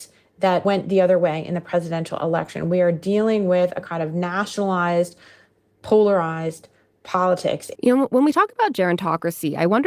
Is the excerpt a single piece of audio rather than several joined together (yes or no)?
no